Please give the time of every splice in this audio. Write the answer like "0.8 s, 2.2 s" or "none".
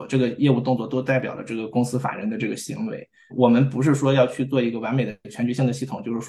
3.3 s